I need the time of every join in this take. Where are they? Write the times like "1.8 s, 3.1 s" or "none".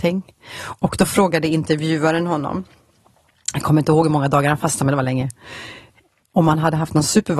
none